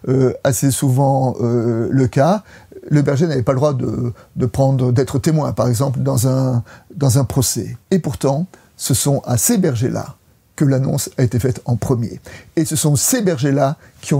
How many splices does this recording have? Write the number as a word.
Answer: one